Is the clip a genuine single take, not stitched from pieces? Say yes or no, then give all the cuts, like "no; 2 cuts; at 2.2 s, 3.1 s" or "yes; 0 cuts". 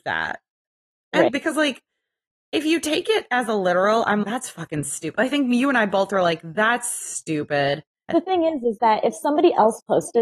no; 3 cuts; at 1.3 s, 4.2 s, 8.1 s